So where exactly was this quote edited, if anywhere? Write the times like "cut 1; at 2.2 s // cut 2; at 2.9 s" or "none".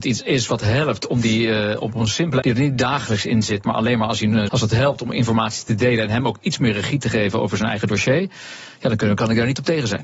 cut 1; at 2.4 s // cut 2; at 4.5 s